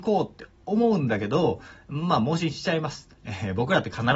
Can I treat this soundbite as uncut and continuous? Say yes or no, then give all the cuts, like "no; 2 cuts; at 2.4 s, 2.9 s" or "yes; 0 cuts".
yes; 0 cuts